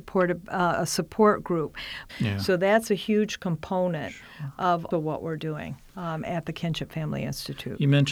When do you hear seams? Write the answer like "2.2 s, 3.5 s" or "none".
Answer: 2.1 s, 4.9 s